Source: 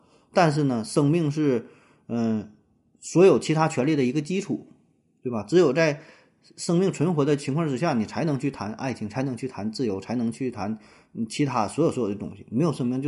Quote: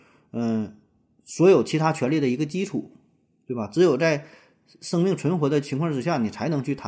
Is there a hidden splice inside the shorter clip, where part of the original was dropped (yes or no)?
no